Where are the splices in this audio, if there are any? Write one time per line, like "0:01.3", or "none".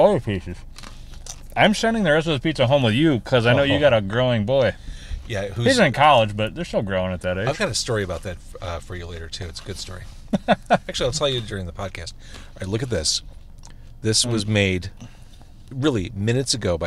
none